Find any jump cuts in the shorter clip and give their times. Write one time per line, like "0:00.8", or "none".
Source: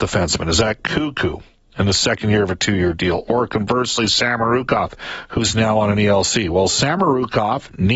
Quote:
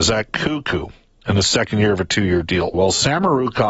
0:02.7